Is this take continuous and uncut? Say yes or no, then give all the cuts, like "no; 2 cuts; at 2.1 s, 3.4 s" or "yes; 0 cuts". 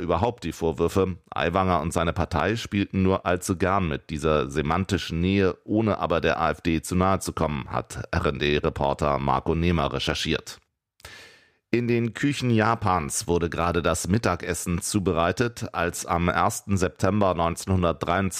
yes; 0 cuts